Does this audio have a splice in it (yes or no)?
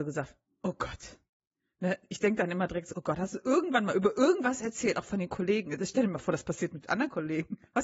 no